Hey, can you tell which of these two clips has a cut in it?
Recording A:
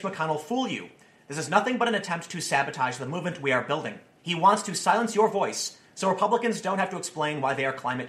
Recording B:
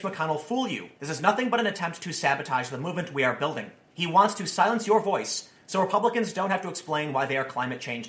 B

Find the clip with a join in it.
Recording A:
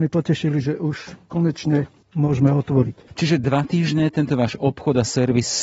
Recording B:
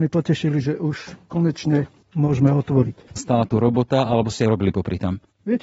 B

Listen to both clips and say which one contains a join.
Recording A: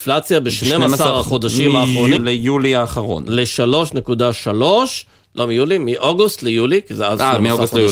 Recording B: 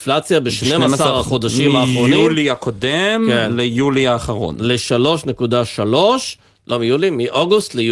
A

